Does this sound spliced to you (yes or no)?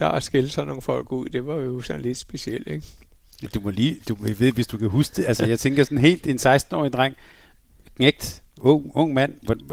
no